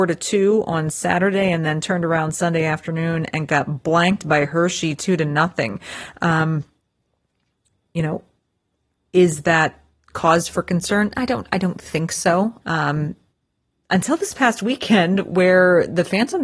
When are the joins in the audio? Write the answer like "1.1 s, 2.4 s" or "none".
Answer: 12.6 s